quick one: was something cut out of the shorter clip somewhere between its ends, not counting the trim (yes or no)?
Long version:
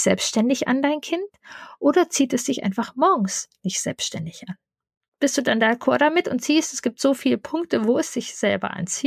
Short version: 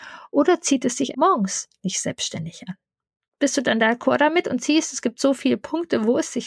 yes